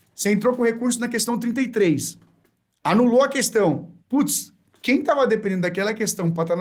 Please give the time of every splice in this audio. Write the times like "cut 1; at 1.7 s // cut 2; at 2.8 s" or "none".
cut 1; at 4.0 s

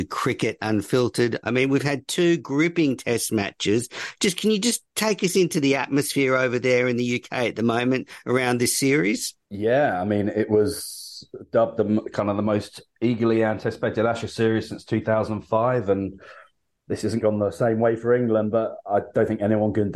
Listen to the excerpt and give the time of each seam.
cut 1; at 1.4 s // cut 2; at 9.4 s // cut 3; at 17.2 s

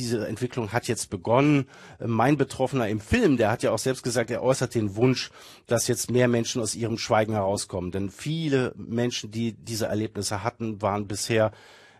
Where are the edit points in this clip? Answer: none

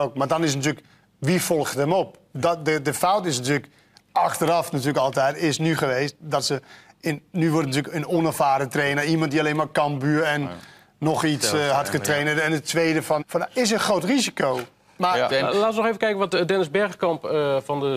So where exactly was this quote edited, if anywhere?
cut 1; at 13.2 s // cut 2; at 15.3 s

